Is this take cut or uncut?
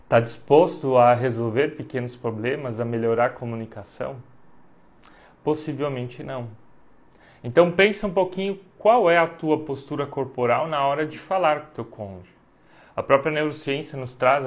uncut